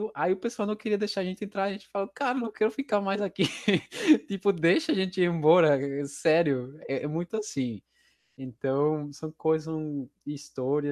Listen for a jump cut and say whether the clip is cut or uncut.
uncut